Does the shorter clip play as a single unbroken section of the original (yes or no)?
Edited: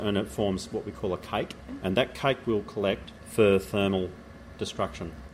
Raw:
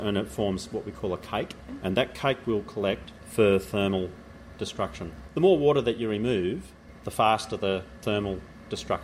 yes